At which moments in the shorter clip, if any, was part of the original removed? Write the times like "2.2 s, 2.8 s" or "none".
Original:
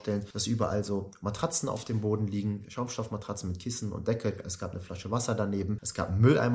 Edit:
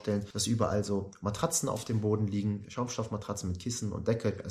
none